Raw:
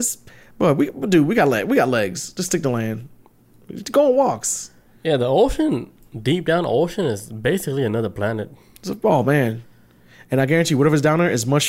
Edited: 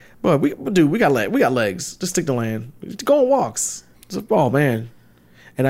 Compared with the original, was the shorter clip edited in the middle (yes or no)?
yes